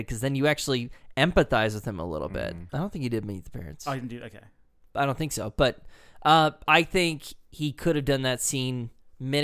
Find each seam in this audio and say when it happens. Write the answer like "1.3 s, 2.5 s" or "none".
2.7 s